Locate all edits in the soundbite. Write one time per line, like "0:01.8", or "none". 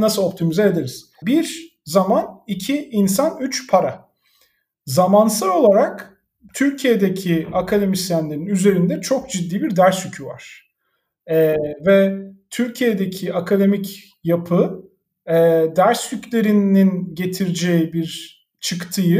0:01.2